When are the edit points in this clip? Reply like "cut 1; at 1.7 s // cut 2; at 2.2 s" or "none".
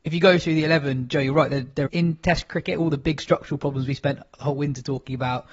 cut 1; at 1.9 s